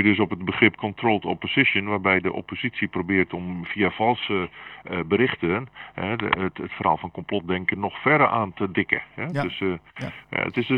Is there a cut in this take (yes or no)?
no